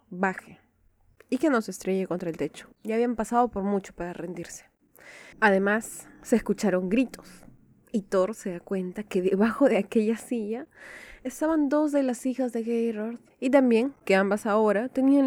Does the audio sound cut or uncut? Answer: cut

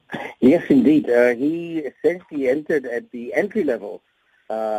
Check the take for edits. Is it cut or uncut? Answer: uncut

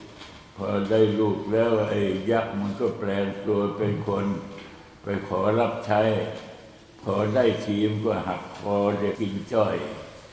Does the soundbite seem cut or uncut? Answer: cut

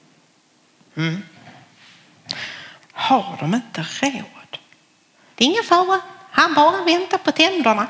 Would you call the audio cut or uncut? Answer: cut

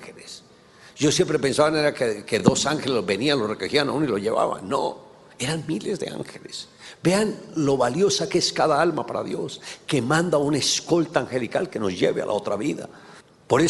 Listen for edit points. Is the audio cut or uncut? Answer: uncut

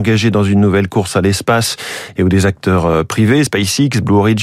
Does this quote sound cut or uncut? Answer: uncut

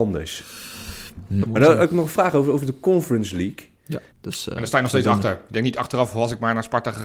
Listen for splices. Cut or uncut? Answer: cut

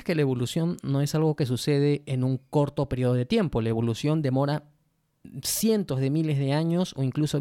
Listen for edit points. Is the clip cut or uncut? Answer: uncut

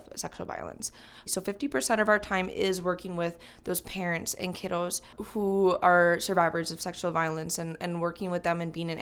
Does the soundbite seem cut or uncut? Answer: cut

